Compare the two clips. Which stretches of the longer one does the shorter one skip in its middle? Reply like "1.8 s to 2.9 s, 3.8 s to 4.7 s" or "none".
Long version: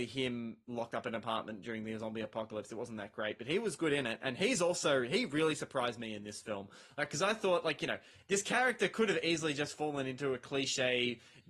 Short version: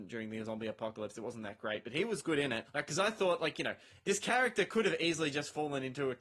4.2 s to 6.9 s